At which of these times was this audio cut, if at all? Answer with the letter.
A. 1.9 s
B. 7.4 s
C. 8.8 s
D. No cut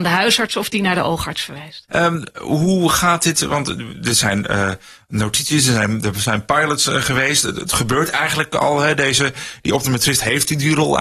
A